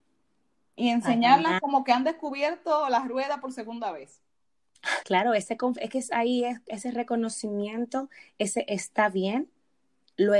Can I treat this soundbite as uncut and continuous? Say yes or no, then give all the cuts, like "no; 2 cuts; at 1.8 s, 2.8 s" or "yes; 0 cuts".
no; 1 cut; at 5.0 s